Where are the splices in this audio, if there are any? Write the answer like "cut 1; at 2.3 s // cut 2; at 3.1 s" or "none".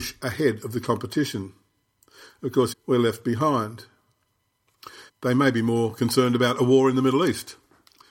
cut 1; at 2.7 s // cut 2; at 5.1 s